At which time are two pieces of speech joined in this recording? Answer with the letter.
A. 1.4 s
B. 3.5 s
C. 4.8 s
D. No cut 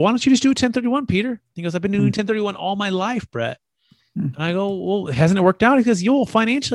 D